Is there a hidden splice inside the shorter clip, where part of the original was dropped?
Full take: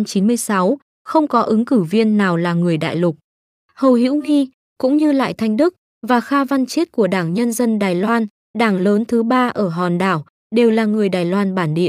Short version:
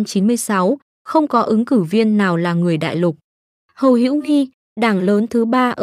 yes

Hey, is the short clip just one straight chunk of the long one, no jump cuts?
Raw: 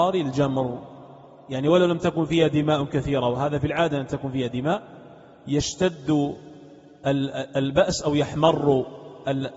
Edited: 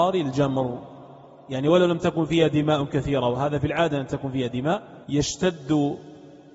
no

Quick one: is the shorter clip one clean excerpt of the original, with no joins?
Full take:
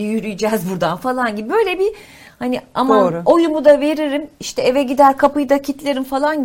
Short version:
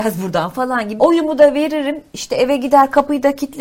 no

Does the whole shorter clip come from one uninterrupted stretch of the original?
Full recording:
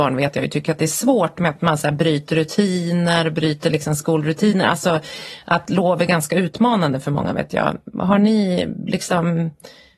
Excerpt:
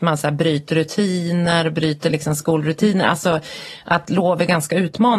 yes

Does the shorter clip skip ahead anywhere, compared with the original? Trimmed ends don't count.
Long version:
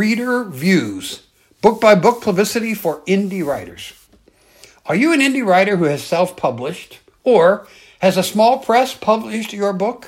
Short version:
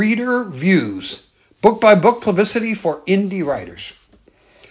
no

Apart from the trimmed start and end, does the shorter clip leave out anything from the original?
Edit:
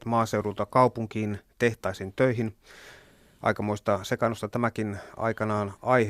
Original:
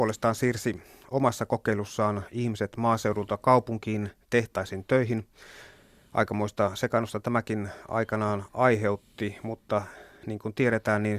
no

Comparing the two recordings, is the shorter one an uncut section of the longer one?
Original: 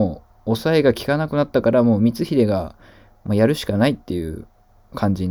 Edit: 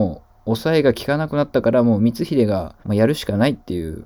no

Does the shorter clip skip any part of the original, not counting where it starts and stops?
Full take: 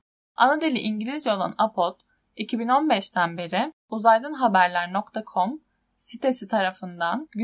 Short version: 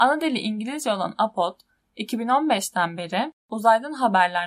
no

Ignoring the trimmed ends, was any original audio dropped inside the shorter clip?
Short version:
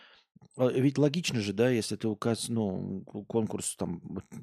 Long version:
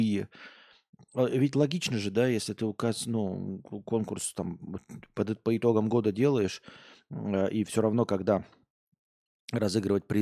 no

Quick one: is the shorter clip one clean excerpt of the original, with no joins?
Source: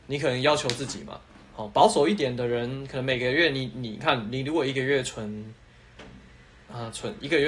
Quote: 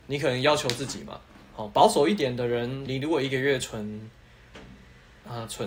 no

